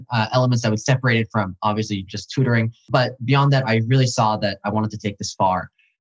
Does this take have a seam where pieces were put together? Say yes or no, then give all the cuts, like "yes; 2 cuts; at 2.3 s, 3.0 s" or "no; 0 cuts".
no; 0 cuts